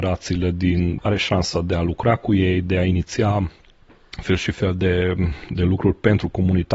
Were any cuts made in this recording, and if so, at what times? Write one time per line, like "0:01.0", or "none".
0:01.0